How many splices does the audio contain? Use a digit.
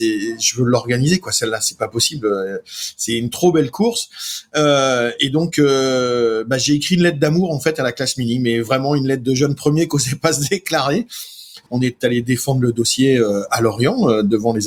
1